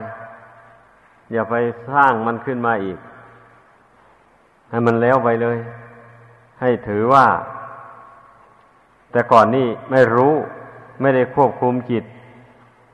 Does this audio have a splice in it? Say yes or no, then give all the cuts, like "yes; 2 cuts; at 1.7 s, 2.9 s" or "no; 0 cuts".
no; 0 cuts